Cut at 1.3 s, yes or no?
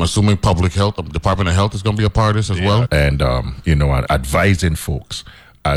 no